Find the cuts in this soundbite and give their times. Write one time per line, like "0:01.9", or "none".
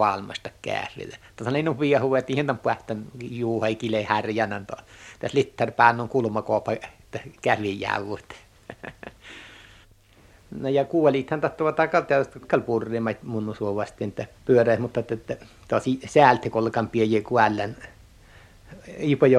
0:12.4
0:14.3